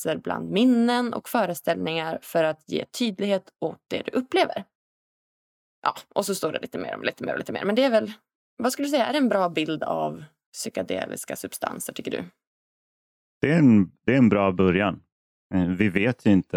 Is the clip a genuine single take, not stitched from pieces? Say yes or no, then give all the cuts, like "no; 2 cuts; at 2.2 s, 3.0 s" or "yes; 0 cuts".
yes; 0 cuts